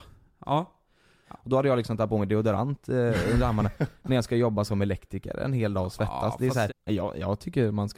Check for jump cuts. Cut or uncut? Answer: cut